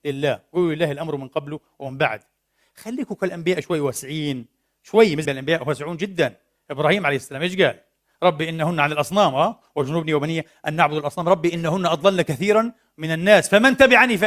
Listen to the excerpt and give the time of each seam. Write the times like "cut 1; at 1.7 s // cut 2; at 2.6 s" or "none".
cut 1; at 5.2 s